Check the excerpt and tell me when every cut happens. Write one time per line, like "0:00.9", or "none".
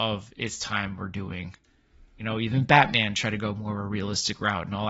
none